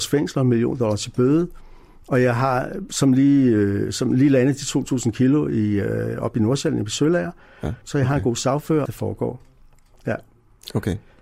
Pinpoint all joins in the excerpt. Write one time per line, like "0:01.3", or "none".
0:07.8
0:08.8

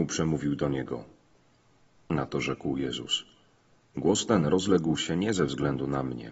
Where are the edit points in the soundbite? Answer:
none

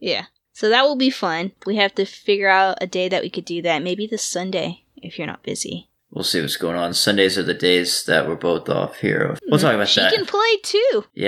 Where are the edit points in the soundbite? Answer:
0:09.4

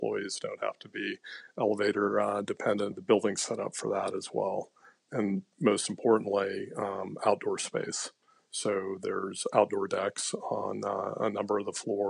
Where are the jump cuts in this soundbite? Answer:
none

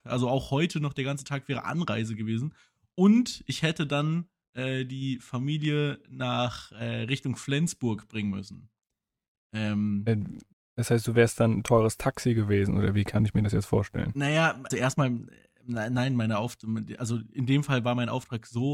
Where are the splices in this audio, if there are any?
0:14.7

